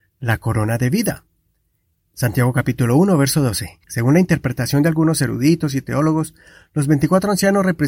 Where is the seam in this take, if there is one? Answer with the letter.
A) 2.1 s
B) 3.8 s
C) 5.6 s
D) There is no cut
B